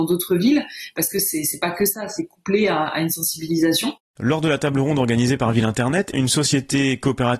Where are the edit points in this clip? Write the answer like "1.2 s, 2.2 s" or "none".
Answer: 4.1 s, 6.1 s